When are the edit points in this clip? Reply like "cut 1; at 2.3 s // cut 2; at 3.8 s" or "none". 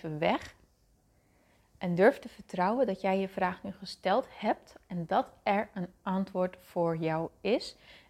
none